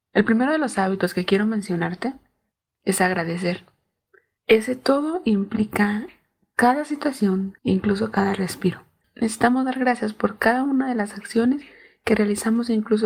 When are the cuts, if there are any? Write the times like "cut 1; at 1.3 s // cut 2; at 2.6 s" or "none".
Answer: cut 1; at 4.4 s // cut 2; at 7.6 s